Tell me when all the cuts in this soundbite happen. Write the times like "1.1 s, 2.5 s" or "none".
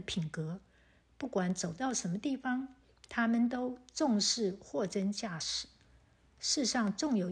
none